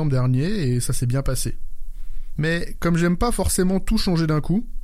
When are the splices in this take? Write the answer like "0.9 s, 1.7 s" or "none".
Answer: 2.4 s